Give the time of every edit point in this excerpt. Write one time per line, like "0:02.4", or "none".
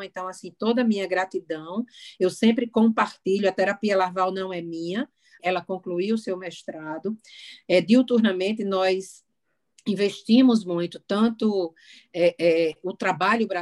0:05.4